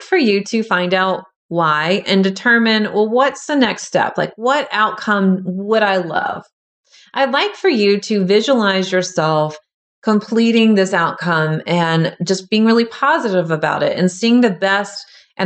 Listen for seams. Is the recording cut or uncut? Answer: uncut